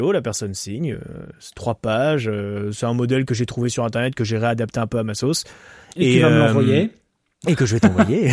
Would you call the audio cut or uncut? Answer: uncut